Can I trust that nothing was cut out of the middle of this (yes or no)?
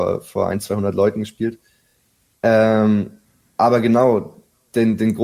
yes